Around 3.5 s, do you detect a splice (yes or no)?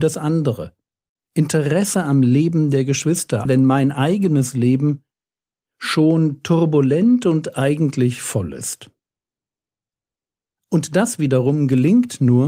yes